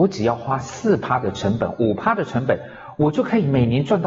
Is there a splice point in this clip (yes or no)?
no